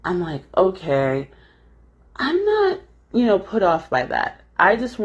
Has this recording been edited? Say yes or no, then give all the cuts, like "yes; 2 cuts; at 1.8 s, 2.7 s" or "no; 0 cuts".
no; 0 cuts